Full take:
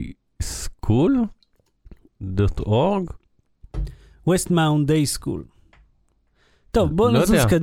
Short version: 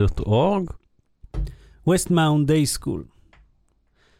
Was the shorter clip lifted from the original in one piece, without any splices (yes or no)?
yes